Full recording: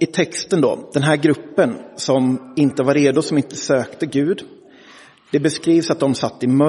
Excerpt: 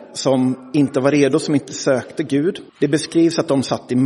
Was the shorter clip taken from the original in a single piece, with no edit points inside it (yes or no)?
no